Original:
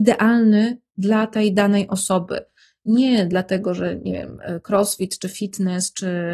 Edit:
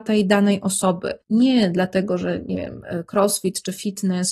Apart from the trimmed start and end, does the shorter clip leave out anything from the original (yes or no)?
yes